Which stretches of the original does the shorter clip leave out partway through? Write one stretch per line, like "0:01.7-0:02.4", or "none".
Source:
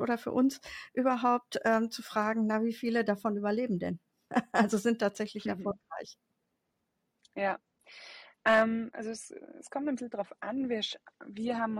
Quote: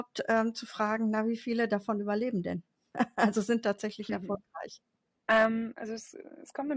0:06.6-0:08.4